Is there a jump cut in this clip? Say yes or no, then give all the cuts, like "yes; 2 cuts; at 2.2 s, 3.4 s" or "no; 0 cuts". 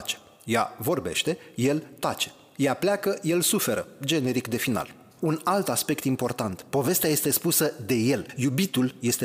no; 0 cuts